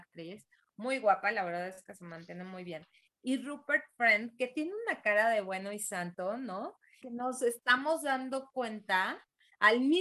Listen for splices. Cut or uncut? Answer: cut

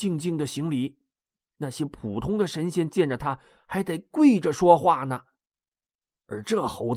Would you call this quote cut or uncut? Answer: uncut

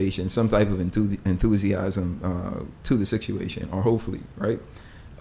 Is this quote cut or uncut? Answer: uncut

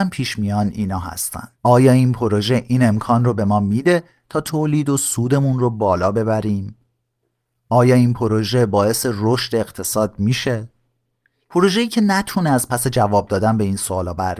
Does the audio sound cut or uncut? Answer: cut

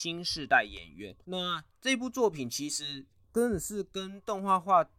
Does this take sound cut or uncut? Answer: cut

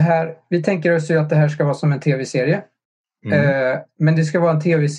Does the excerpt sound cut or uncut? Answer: uncut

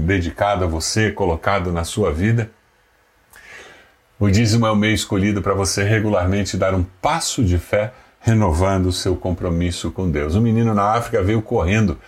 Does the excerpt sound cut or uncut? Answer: uncut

